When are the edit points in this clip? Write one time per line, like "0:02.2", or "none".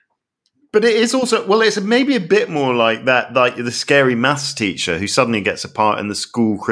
none